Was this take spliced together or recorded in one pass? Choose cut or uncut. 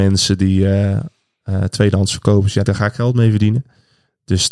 cut